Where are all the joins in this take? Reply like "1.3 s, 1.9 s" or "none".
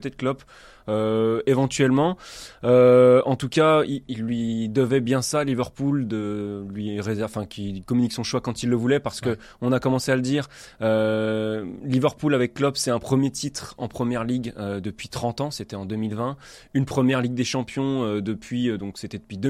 4.1 s